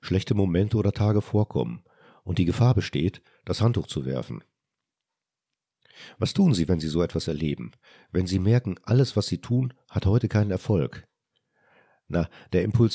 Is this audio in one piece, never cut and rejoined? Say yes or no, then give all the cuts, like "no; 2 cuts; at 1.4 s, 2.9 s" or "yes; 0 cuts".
yes; 0 cuts